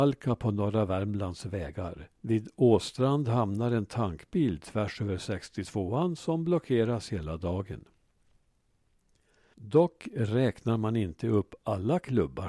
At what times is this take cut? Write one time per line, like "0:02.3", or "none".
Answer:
0:02.2
0:09.5